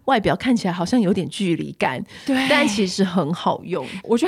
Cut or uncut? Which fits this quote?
uncut